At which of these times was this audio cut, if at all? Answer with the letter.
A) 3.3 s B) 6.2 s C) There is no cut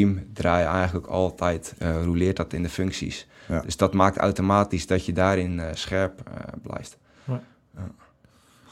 C